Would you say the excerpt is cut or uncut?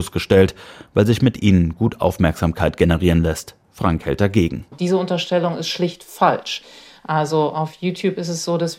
uncut